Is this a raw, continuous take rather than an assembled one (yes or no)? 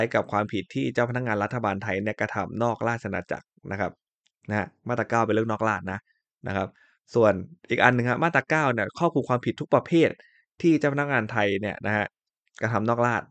yes